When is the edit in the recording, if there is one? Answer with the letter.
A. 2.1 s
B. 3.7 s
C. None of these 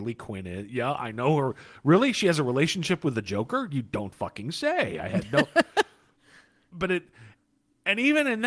C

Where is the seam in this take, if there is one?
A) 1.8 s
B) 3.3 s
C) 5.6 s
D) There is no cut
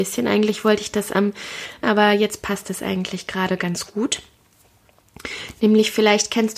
A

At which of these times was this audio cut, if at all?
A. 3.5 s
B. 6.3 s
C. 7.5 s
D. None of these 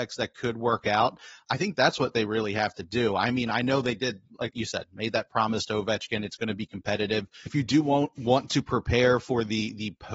C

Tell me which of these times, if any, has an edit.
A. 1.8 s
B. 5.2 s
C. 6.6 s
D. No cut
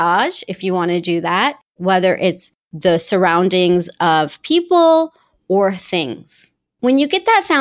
A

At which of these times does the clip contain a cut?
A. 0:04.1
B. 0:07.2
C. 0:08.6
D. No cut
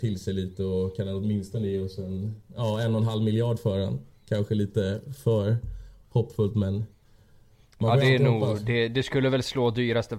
D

